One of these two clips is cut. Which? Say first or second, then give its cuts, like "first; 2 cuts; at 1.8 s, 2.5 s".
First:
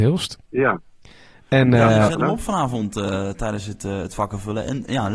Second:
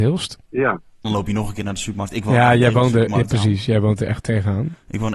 second; 1 cut; at 1.0 s